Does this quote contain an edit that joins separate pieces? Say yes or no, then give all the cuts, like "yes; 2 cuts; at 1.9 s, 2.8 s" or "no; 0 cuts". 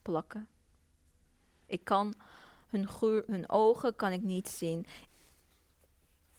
yes; 2 cuts; at 3.3 s, 5.1 s